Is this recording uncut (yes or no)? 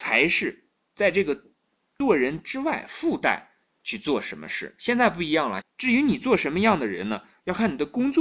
no